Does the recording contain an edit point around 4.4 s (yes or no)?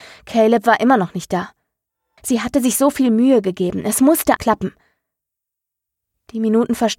yes